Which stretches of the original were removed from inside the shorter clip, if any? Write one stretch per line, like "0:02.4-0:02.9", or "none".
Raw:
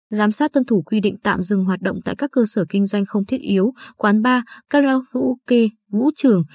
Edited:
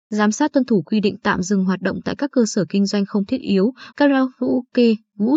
0:03.9-0:04.6